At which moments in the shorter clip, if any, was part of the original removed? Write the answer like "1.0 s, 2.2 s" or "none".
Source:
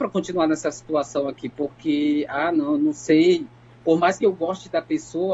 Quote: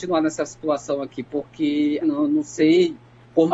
2.0 s